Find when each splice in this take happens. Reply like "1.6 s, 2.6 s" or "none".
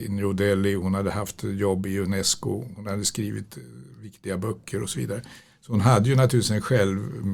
none